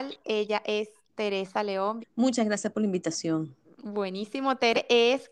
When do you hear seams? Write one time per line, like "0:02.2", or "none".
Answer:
0:02.0